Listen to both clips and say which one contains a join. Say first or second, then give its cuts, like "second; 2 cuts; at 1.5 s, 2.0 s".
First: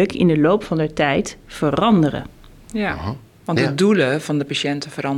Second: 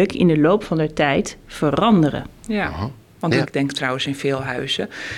second; 2 cuts; at 2.4 s, 3.4 s